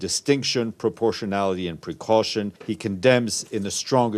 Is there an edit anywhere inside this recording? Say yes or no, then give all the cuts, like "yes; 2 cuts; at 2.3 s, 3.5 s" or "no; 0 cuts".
yes; 1 cut; at 2.6 s